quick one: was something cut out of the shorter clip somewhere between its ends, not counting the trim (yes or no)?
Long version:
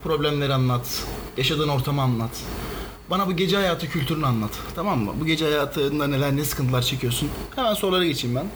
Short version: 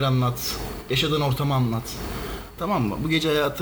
yes